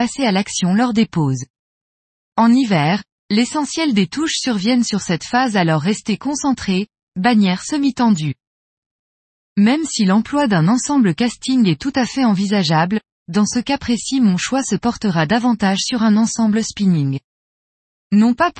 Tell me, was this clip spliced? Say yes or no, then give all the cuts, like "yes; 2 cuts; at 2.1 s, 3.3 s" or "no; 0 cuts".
no; 0 cuts